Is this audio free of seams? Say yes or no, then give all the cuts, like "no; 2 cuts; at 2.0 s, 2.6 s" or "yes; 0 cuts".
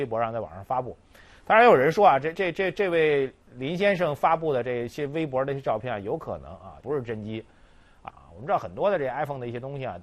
no; 3 cuts; at 2.3 s, 6.8 s, 8.1 s